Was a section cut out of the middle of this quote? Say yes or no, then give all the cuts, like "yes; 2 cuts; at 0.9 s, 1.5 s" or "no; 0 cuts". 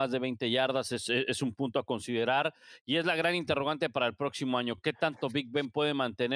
no; 0 cuts